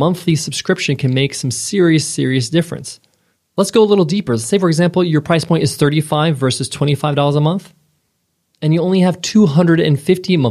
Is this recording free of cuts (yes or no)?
yes